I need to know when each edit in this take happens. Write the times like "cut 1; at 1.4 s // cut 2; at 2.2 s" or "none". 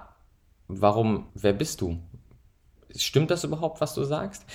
cut 1; at 1.3 s